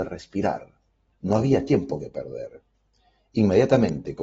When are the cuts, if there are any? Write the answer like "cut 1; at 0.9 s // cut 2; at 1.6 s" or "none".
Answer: cut 1; at 1.1 s